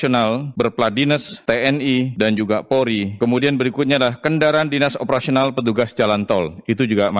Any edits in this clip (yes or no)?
no